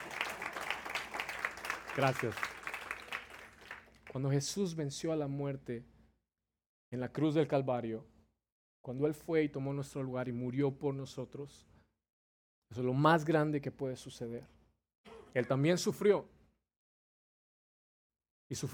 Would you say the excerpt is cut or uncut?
uncut